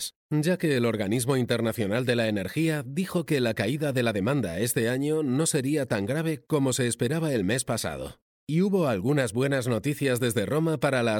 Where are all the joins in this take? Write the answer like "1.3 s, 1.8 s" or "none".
none